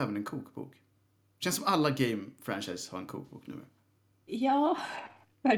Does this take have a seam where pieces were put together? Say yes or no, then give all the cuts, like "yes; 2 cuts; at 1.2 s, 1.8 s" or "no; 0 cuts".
no; 0 cuts